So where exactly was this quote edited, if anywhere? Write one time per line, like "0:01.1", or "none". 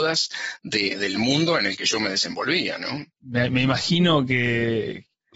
0:03.1